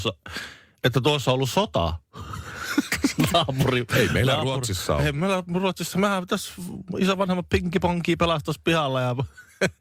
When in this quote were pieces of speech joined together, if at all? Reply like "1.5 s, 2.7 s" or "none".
none